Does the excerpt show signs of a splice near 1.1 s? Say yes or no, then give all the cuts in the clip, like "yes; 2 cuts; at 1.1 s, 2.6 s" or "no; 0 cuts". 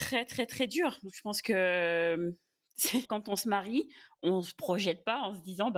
no; 1 cut; at 3.0 s